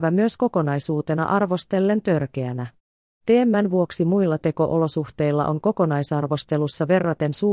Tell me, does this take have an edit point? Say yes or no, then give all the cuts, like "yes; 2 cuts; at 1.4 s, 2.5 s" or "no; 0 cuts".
yes; 1 cut; at 3.0 s